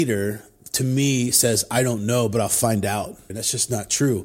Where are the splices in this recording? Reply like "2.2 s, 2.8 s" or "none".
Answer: 3.3 s